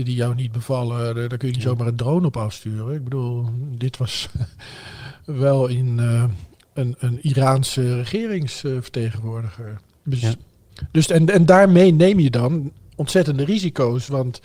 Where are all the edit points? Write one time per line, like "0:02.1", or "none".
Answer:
none